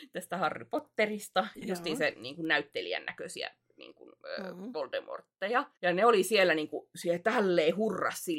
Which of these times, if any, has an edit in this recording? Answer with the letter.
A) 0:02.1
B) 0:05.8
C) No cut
B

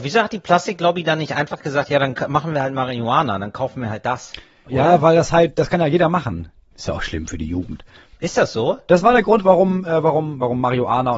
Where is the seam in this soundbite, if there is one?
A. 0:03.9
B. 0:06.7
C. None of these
B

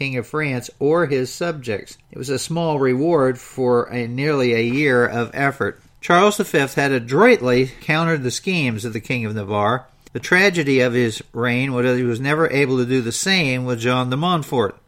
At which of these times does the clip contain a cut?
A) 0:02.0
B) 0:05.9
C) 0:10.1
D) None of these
A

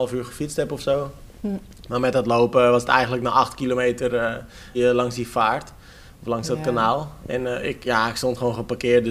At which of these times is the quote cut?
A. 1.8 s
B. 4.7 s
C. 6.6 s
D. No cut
B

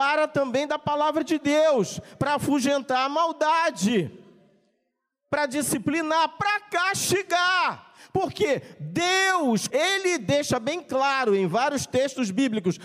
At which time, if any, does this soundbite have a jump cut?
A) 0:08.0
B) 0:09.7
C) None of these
B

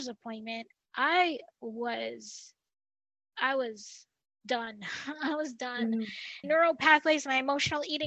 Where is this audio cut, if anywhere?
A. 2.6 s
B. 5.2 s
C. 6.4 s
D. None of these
C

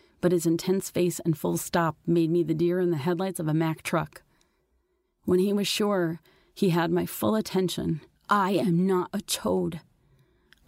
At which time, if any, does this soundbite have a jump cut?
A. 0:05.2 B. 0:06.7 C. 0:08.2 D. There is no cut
C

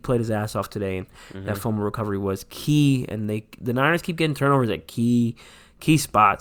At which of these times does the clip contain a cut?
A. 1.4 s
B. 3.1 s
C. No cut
C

